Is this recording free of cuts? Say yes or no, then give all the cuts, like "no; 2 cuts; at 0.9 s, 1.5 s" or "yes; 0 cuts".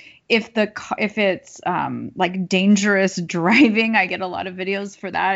yes; 0 cuts